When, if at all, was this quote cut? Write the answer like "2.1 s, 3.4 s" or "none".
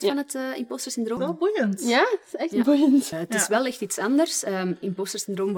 1.2 s, 3.1 s